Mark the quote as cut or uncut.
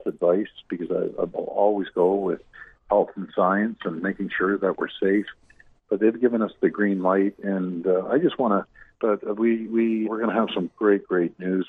cut